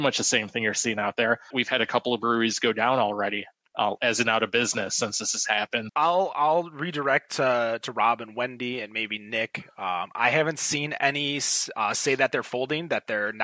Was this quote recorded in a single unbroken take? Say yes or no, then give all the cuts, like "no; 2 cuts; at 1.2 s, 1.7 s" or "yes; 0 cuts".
no; 2 cuts; at 1.5 s, 5.9 s